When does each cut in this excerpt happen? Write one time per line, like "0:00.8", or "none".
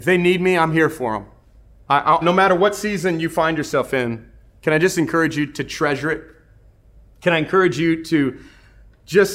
0:02.2